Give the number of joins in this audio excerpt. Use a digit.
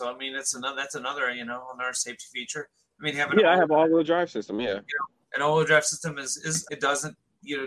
1